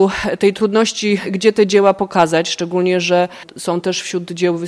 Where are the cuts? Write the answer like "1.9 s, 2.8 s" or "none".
1.2 s